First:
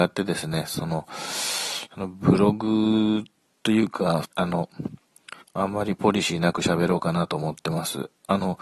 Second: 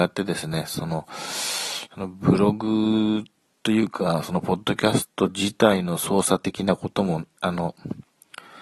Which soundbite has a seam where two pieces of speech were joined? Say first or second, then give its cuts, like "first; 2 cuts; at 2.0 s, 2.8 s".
first; 2 cuts; at 4.2 s, 5.4 s